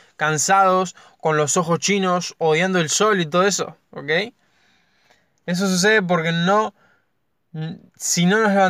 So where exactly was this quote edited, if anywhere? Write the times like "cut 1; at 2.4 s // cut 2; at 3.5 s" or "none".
none